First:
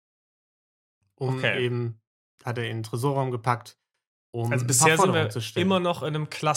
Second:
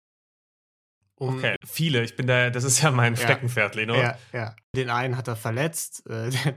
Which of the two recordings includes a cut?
second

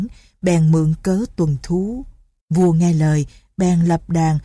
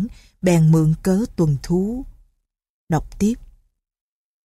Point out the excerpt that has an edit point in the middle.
first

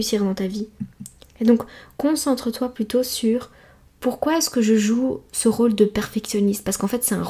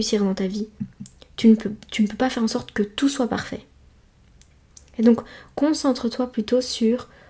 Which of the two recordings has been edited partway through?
first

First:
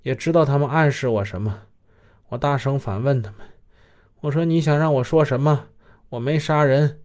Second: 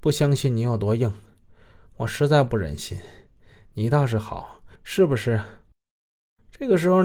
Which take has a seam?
second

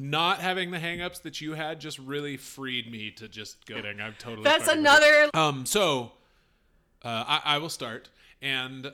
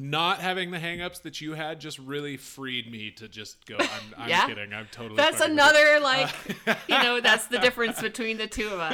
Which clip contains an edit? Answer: first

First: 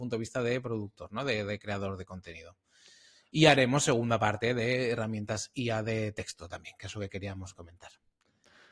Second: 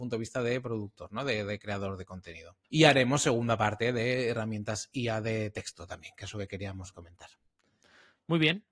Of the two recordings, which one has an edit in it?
second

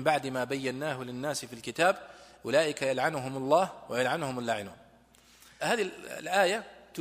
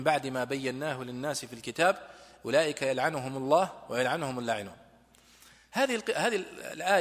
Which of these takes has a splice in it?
first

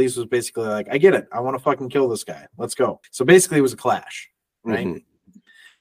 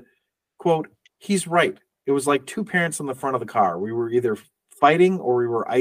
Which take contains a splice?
first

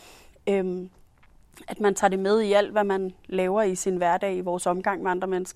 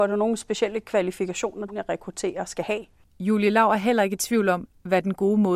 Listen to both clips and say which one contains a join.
second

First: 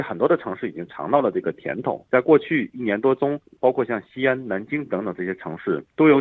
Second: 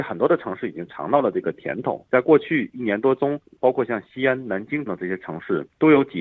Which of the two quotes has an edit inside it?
second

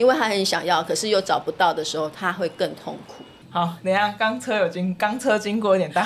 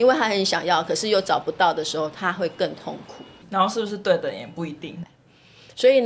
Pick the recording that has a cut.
second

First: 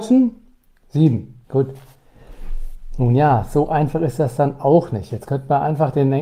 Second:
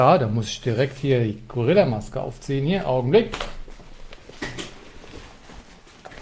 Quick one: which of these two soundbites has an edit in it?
first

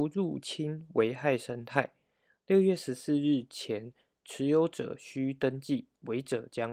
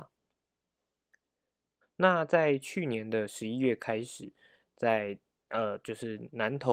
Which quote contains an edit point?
second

